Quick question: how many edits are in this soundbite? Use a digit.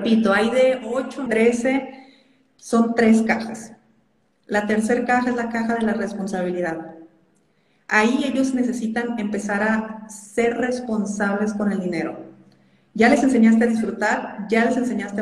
1